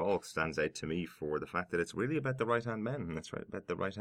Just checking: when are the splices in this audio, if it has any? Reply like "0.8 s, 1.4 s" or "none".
none